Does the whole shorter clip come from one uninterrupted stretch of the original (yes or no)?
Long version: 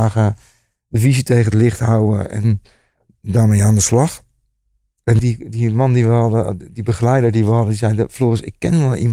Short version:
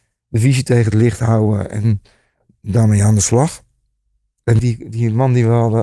yes